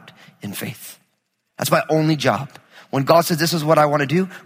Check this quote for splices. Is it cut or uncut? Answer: uncut